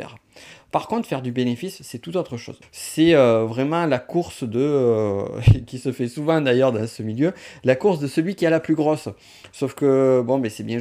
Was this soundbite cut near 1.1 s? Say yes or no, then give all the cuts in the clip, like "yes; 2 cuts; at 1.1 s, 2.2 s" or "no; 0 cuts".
no; 1 cut; at 2.6 s